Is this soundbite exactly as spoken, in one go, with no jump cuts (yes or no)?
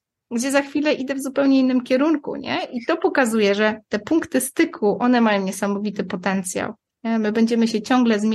yes